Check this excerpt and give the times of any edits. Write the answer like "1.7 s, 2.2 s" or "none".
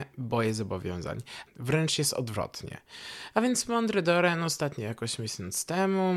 1.5 s